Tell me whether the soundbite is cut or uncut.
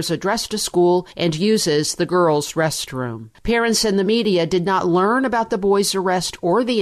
uncut